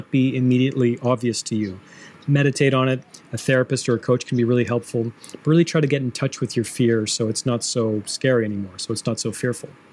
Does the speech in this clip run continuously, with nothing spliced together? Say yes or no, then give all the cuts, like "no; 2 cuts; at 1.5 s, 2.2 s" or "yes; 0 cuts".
yes; 0 cuts